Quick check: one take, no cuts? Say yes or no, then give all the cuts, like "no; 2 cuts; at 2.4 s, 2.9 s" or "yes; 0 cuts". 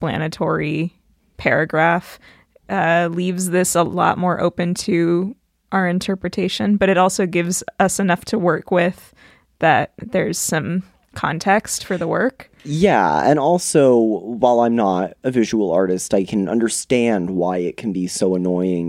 yes; 0 cuts